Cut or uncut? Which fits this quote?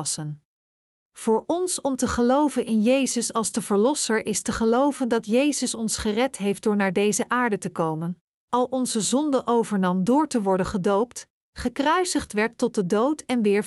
cut